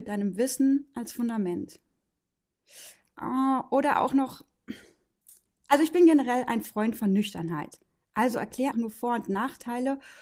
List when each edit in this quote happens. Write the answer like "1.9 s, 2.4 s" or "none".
8.7 s